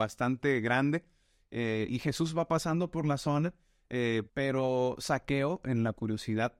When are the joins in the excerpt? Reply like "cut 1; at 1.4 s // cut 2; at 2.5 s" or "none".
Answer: cut 1; at 1.9 s // cut 2; at 4.3 s